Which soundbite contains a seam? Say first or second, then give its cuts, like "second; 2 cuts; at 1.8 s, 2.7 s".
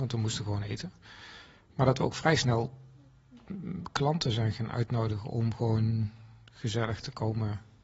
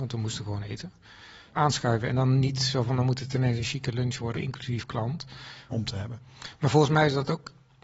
second; 3 cuts; at 1.5 s, 4.3 s, 5.7 s